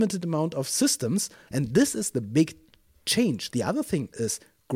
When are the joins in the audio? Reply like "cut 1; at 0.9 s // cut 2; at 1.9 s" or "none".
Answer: cut 1; at 1.5 s // cut 2; at 3.5 s